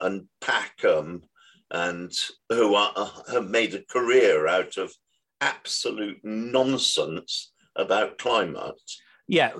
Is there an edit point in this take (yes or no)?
no